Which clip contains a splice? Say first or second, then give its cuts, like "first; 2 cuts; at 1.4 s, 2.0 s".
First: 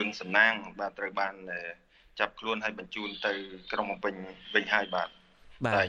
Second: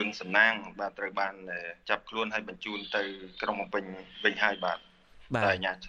second; 1 cut; at 1.8 s